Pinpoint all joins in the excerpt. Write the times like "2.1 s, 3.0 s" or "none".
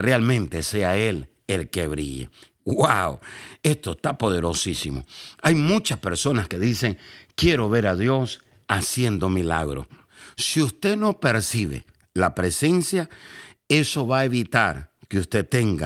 none